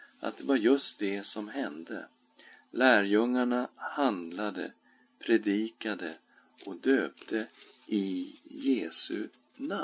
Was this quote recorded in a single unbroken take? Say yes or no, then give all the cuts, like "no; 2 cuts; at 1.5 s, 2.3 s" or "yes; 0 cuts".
yes; 0 cuts